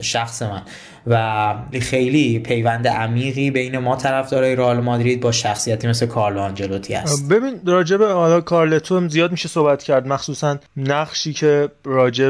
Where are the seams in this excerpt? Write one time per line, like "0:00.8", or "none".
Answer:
0:01.7
0:10.7